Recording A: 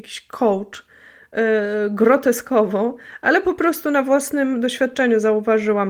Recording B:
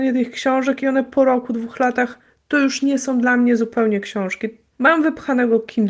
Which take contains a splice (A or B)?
B